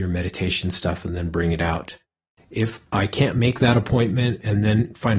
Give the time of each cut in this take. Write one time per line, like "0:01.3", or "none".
0:02.4